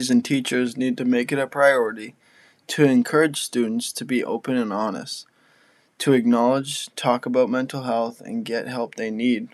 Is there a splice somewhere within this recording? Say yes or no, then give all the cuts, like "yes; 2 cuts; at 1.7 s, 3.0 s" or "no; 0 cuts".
no; 0 cuts